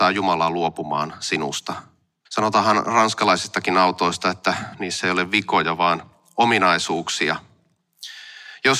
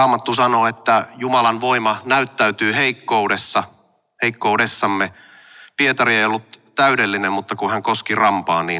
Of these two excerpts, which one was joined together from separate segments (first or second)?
first